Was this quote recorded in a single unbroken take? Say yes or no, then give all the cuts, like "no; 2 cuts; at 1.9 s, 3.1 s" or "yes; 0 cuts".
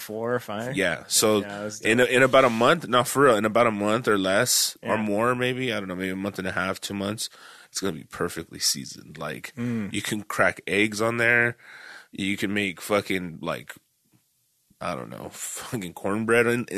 yes; 0 cuts